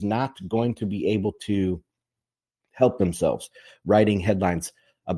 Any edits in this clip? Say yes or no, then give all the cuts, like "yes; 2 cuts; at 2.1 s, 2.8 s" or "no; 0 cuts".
no; 0 cuts